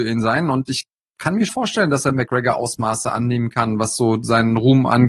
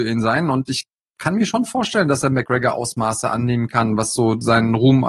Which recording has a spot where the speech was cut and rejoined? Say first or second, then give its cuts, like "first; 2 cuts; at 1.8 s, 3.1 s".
first; 1 cut; at 1.5 s